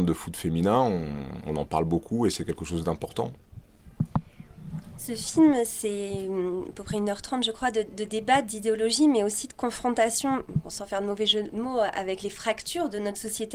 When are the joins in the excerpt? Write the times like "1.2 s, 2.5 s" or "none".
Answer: none

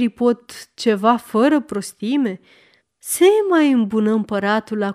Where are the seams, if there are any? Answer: 2.8 s

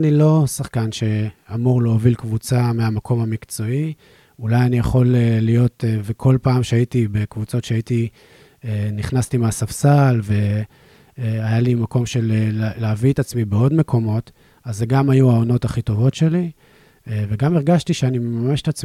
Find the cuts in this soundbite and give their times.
none

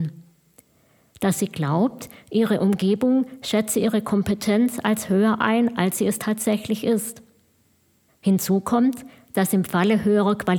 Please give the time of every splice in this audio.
8.1 s

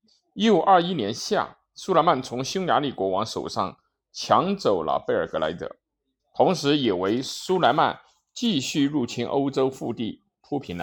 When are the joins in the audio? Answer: 6.2 s

